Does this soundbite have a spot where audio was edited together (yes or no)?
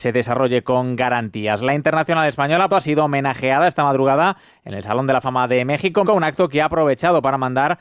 yes